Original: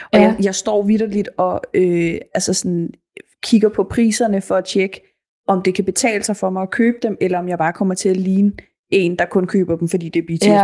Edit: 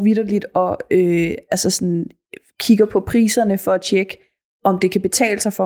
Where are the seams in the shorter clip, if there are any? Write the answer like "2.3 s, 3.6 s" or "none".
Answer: none